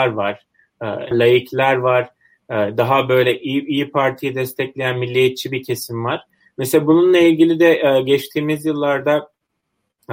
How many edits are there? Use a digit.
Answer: 1